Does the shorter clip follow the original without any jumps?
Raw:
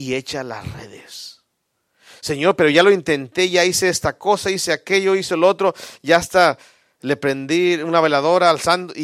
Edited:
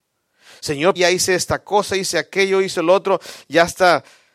no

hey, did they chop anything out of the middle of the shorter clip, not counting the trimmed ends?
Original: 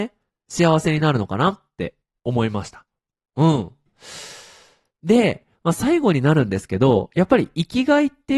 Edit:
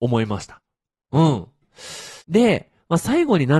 yes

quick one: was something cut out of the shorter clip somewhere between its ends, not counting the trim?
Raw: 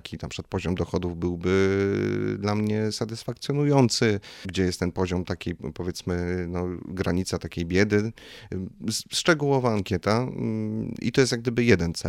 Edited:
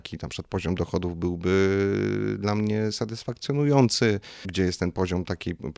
no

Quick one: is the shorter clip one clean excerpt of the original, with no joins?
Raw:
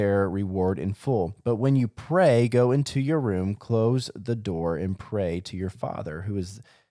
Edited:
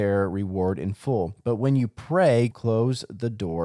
no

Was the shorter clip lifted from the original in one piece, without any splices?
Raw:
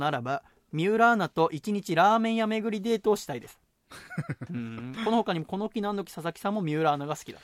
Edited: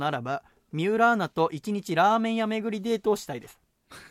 yes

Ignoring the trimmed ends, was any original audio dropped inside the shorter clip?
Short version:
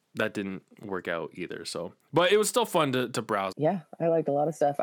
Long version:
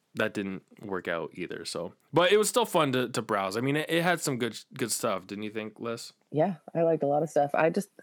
yes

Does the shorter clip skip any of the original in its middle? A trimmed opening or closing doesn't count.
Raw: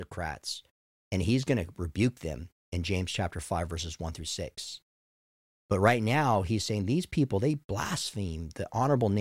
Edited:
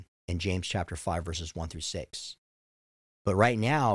no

